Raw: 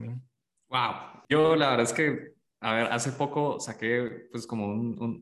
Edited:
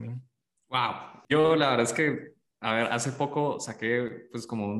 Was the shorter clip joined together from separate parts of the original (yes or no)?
no